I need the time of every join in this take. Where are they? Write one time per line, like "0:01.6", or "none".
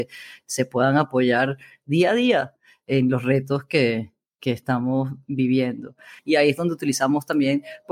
0:06.2